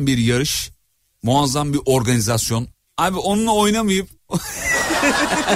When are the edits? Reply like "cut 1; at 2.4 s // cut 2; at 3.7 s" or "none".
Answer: cut 1; at 2.9 s